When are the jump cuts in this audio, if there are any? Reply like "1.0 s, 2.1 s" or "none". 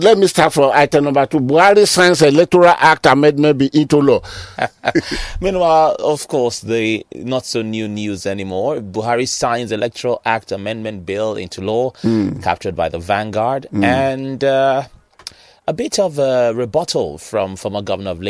4.5 s